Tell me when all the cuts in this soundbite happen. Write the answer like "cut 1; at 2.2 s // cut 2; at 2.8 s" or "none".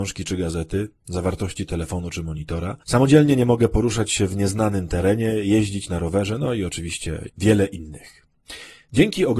cut 1; at 2.8 s // cut 2; at 7.3 s